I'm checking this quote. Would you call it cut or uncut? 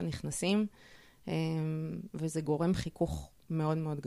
uncut